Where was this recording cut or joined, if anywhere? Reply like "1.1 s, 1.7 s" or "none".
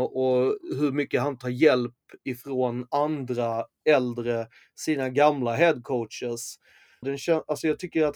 7.0 s